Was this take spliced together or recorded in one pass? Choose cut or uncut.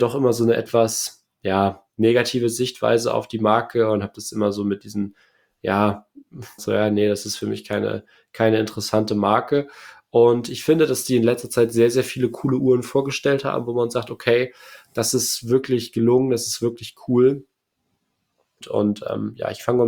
cut